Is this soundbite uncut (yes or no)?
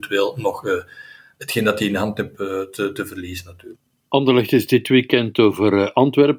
yes